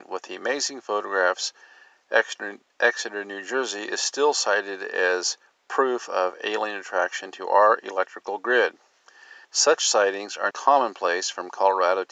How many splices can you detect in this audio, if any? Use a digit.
2